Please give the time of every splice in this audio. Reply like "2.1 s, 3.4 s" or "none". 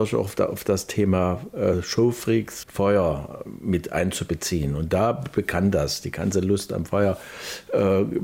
2.6 s